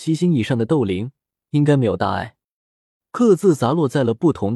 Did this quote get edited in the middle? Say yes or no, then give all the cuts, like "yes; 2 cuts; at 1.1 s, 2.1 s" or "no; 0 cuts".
yes; 1 cut; at 3.0 s